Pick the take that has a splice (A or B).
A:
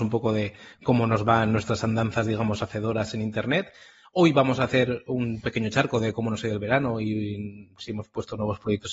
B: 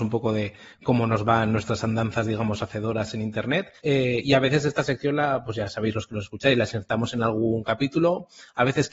B